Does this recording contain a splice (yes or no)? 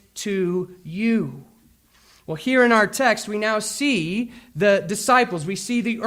no